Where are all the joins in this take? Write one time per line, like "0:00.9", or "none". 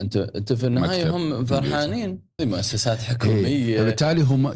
0:02.4